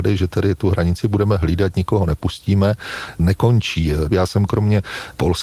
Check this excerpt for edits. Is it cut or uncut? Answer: cut